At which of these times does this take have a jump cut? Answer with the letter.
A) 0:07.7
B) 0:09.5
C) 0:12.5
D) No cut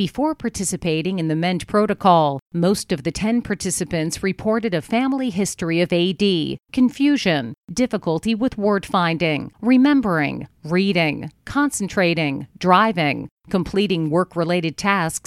B